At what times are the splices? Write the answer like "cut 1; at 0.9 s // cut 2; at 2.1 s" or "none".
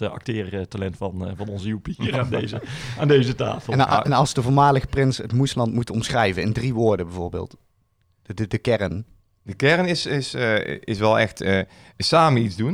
none